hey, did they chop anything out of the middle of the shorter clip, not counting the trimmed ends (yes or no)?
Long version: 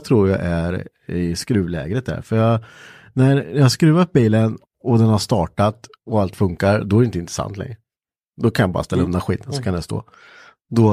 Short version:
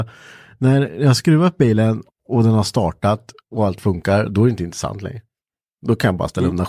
no